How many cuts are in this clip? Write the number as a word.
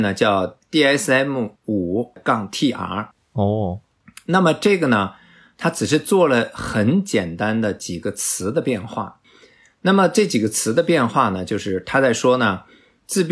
zero